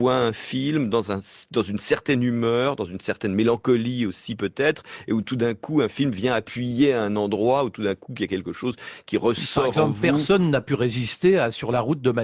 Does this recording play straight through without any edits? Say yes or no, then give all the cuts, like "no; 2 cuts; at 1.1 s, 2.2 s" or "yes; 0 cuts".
yes; 0 cuts